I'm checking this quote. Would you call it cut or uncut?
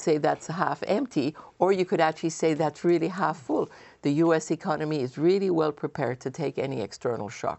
uncut